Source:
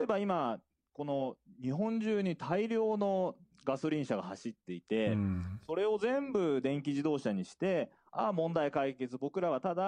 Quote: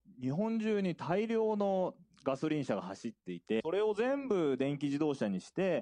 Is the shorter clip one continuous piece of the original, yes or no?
no